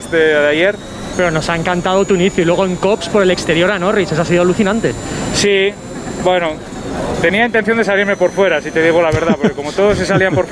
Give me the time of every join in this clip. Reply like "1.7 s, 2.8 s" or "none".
1.1 s